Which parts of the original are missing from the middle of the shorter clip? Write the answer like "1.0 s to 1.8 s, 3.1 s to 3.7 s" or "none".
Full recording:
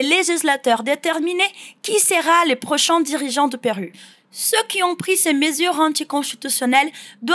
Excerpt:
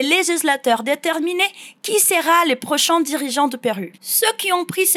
3.9 s to 4.2 s